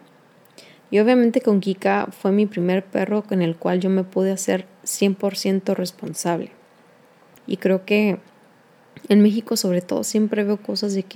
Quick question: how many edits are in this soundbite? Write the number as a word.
two